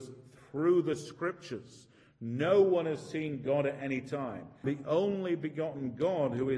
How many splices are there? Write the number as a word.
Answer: one